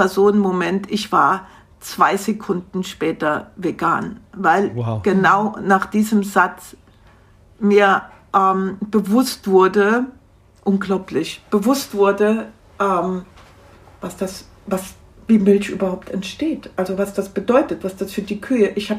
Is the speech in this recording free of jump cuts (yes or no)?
yes